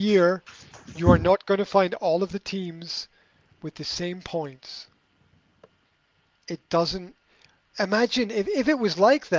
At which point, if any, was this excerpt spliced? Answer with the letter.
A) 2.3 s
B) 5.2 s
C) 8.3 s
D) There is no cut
D